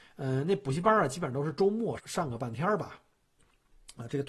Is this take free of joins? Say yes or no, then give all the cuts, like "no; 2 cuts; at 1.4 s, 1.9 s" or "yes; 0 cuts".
no; 1 cut; at 2.0 s